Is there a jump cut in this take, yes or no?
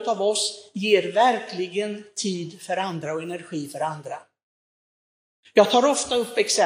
no